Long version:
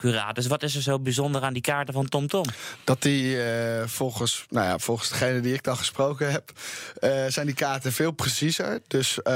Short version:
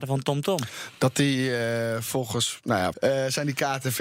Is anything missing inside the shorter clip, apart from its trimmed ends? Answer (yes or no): yes